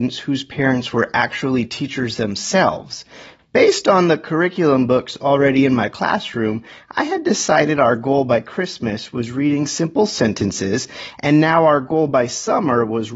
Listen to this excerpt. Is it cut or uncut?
cut